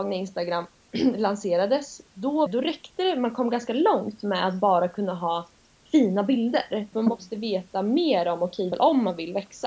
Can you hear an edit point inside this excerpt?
yes; 3 cuts; at 2.5 s, 6.9 s, 8.7 s

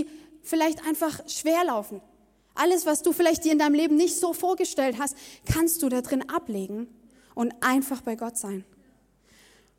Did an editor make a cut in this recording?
no; 0 cuts

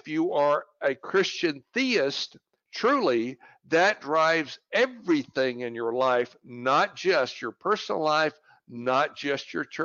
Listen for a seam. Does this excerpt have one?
no; 0 cuts

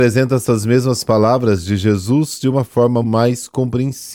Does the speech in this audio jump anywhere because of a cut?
yes; 1 cut; at 3.0 s

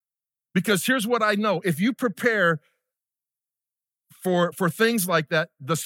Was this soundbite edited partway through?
no; 0 cuts

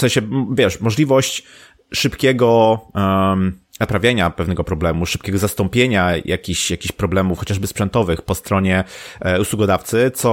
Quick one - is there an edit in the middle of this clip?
no; 0 cuts

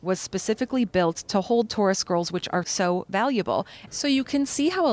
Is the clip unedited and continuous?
no; 2 cuts; at 2.6 s, 3.9 s

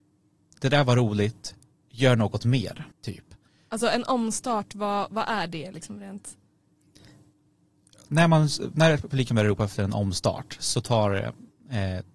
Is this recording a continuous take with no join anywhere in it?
no; 1 cut; at 2.9 s

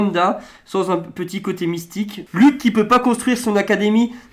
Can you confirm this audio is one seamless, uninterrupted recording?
no; 1 cut; at 2.3 s

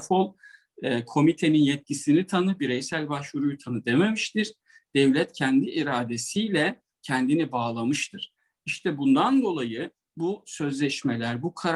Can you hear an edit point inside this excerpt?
no; 0 cuts

